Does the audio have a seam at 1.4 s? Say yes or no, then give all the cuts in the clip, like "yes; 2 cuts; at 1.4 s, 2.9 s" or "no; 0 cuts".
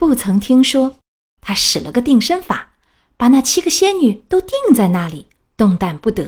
yes; 1 cut; at 1.4 s